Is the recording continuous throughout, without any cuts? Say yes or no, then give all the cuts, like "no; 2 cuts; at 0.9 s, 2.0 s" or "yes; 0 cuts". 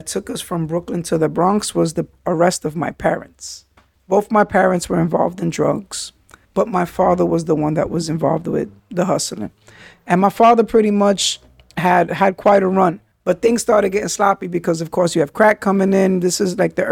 yes; 0 cuts